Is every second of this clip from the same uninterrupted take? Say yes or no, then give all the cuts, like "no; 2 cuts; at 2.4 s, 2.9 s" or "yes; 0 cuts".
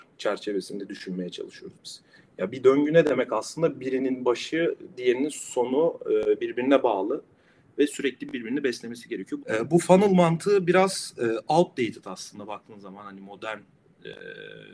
no; 1 cut; at 9.4 s